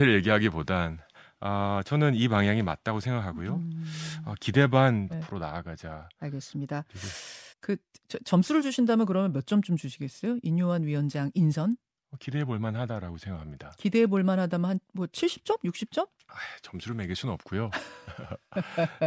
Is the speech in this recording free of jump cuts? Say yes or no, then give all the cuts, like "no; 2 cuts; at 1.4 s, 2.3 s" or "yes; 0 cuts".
no; 2 cuts; at 5.1 s, 7.5 s